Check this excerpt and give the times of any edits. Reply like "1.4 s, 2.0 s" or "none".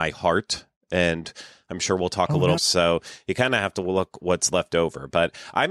2.6 s